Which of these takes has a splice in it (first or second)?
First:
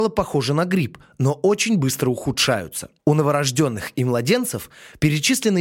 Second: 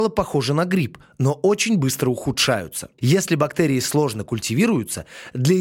second